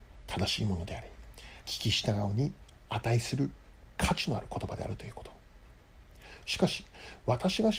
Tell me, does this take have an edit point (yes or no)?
yes